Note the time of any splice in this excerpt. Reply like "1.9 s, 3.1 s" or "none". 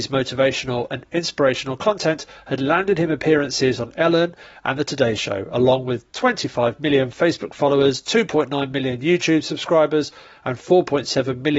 none

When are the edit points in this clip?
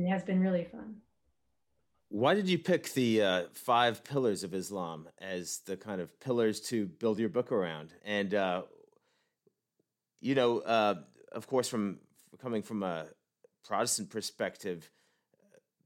8.0 s

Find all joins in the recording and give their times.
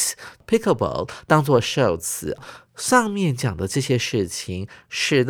none

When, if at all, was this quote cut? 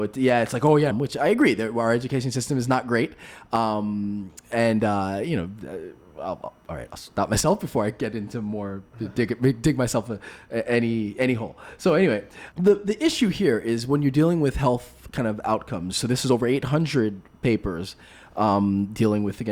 0.9 s, 12.5 s, 15.9 s

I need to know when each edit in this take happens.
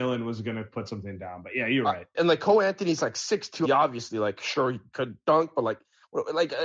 2.1 s, 3.6 s

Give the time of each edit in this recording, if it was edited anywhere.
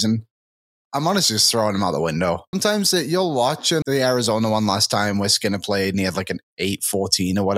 2.5 s, 3.8 s

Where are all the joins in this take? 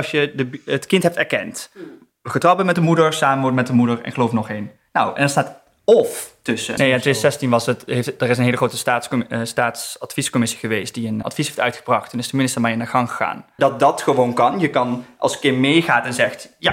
6.8 s, 11.2 s, 13.6 s

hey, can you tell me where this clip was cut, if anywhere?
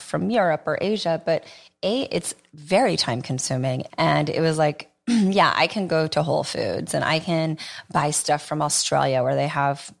3.9 s

